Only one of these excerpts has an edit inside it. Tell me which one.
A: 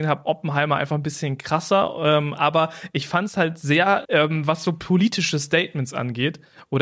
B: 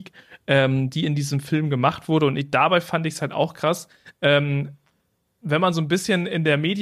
A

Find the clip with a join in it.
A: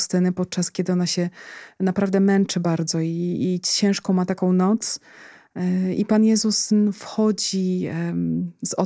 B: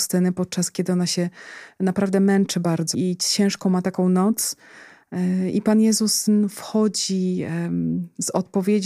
B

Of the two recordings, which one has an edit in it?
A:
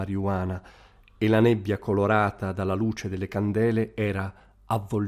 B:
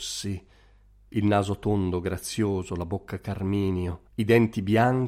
B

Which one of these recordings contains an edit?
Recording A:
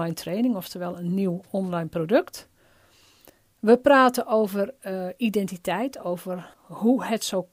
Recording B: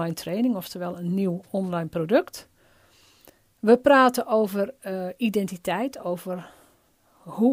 A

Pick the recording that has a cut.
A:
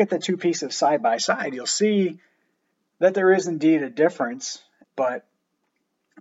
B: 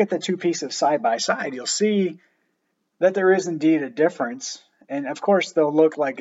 A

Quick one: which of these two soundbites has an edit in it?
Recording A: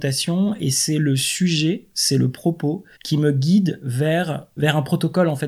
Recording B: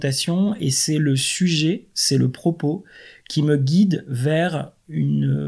A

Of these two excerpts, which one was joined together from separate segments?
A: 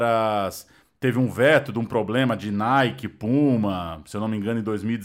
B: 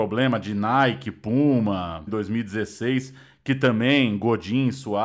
B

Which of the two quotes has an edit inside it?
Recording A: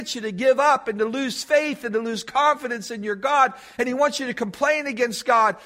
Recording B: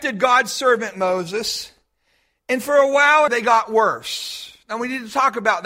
B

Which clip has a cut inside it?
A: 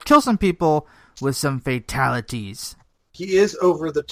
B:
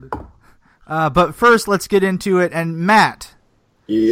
A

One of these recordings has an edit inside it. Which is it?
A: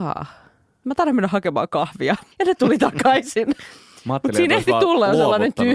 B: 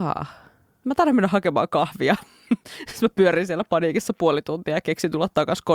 A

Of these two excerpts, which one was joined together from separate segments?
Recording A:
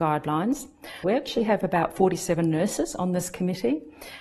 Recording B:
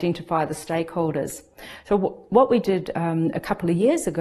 A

